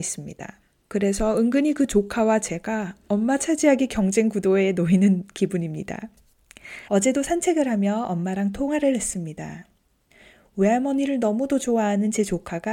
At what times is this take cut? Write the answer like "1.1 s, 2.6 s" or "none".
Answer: 6.9 s